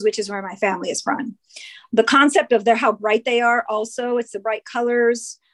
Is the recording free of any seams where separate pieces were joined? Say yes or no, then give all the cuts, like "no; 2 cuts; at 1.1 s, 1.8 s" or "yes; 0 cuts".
yes; 0 cuts